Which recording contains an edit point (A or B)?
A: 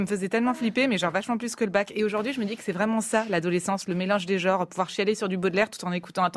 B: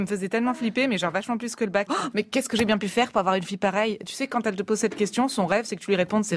B